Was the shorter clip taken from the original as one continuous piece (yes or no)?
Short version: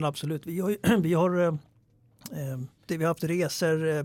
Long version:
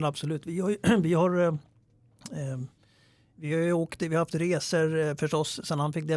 no